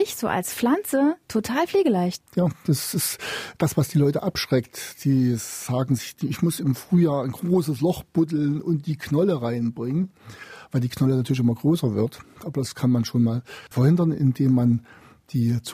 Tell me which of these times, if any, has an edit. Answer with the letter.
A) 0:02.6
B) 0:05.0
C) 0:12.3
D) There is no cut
D